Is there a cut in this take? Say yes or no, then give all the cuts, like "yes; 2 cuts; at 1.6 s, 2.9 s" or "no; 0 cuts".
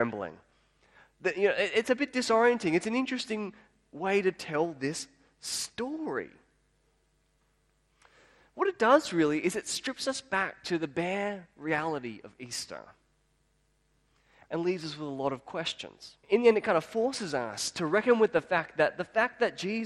yes; 1 cut; at 16.2 s